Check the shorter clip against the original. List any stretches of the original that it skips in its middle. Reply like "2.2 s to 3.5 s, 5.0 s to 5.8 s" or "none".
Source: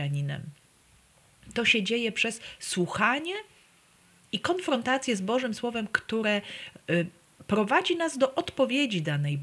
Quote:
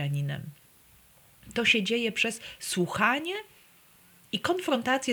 none